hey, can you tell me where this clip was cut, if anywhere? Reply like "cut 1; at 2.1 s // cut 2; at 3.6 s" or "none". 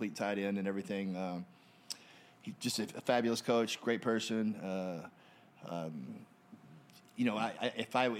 none